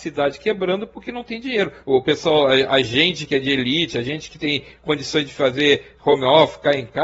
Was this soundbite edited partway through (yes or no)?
yes